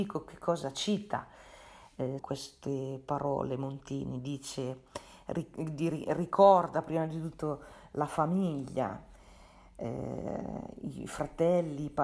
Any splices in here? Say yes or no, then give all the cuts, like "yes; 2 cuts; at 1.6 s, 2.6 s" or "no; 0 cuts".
yes; 1 cut; at 2.2 s